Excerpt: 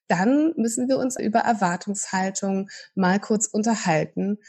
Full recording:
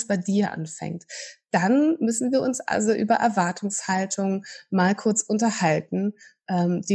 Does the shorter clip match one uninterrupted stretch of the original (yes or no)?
no